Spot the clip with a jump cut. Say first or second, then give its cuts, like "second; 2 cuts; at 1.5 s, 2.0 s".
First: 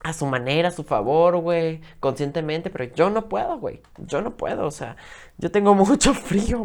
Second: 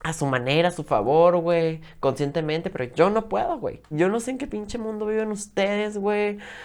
second; 1 cut; at 3.9 s